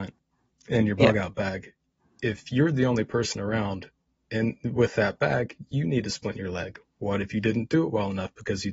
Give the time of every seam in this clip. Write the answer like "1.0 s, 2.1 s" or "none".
none